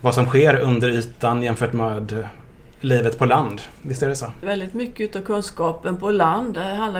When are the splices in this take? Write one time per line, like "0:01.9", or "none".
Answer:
0:04.4